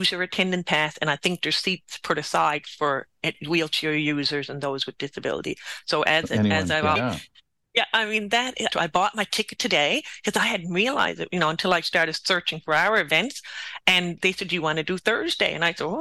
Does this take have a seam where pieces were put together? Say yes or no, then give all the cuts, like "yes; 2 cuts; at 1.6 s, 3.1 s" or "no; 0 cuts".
yes; 3 cuts; at 7.0 s, 8.7 s, 14.2 s